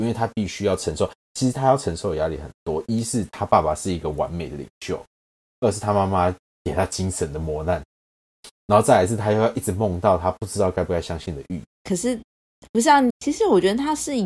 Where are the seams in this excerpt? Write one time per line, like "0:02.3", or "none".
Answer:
0:11.7
0:13.1